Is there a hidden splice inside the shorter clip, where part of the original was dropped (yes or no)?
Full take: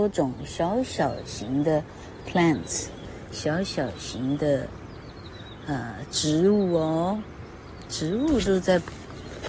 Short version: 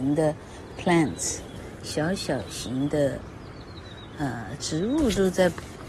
yes